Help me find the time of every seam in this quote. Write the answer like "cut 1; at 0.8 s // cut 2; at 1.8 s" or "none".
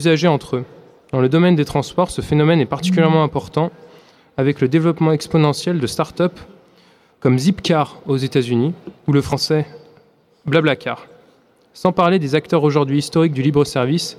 none